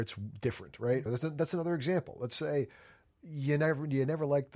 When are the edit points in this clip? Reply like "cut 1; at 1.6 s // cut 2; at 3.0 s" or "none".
cut 1; at 1.1 s